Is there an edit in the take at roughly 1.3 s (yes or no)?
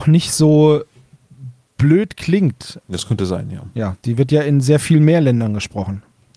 no